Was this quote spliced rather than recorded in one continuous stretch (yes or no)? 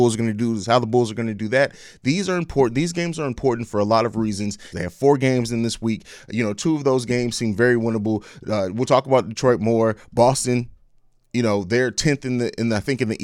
yes